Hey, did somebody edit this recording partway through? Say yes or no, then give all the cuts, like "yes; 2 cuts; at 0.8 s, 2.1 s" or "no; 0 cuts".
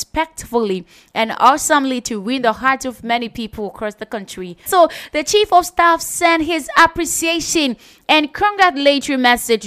yes; 1 cut; at 4.7 s